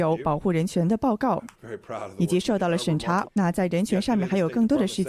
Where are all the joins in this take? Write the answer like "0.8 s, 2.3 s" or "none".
3.2 s